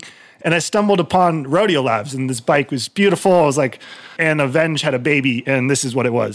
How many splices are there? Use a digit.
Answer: 1